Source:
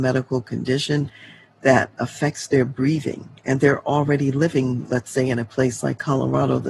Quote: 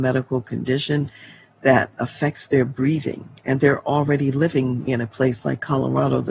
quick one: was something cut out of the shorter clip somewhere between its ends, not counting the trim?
yes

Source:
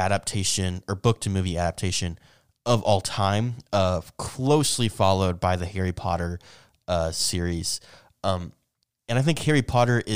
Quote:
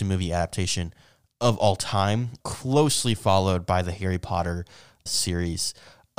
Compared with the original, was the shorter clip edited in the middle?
yes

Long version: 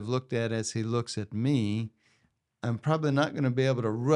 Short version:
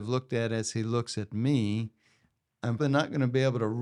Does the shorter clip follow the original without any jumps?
no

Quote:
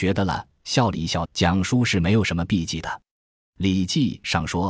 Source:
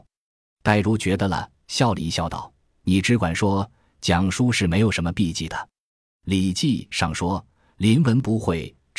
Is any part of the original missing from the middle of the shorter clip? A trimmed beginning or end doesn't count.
yes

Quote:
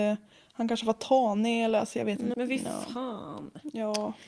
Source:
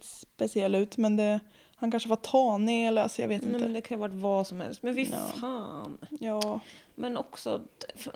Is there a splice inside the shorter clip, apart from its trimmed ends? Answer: yes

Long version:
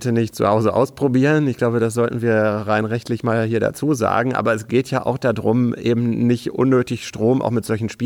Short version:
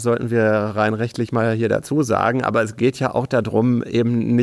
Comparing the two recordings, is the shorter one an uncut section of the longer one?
yes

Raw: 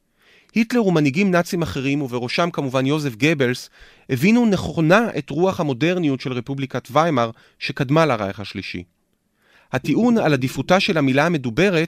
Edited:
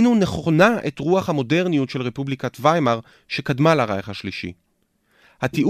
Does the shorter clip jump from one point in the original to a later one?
no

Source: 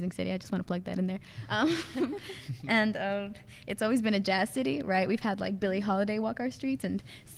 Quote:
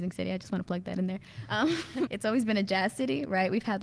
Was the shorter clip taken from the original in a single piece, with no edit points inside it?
no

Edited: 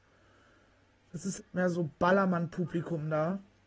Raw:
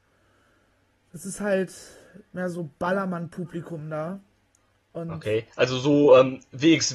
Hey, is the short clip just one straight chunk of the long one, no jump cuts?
no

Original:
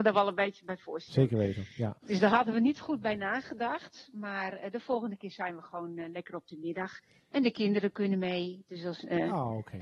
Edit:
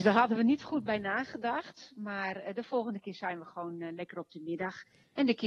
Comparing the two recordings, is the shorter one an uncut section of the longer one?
yes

